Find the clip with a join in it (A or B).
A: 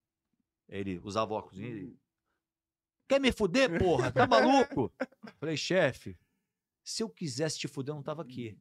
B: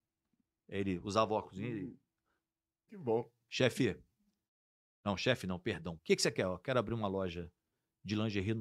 B